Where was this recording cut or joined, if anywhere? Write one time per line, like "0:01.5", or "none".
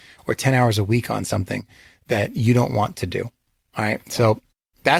none